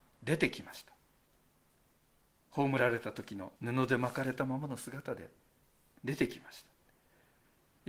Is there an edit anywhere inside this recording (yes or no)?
yes